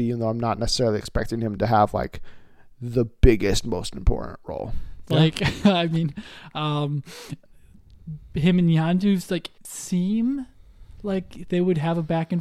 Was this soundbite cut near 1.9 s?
no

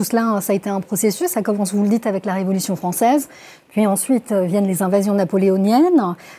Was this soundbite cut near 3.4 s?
no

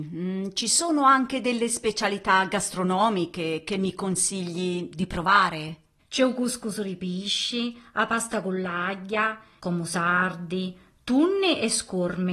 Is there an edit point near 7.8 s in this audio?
no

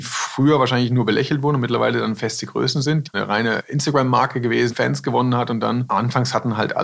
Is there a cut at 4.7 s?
yes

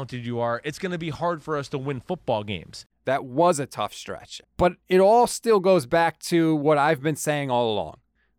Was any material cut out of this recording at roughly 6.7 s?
no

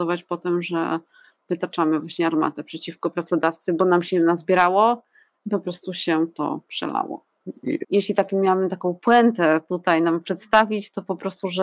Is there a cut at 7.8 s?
yes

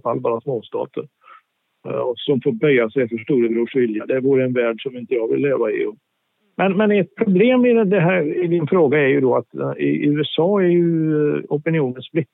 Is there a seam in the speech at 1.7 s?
no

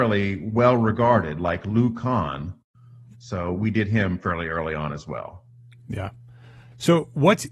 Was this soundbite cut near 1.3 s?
no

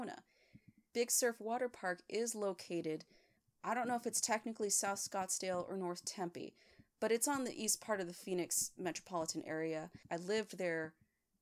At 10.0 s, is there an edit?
yes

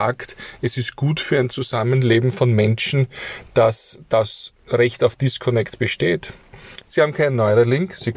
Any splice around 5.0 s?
no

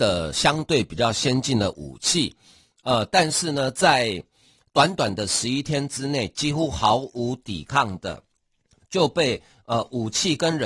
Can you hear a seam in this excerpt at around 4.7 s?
no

